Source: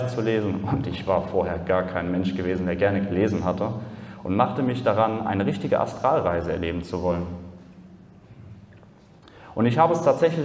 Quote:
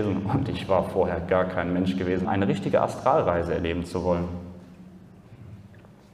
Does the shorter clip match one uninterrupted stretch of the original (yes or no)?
no